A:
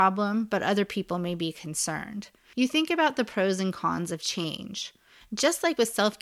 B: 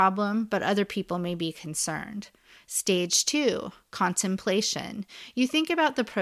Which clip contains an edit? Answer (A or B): A